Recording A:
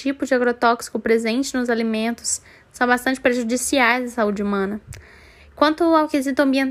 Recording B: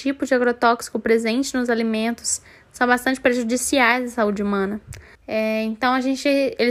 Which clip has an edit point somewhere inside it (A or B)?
B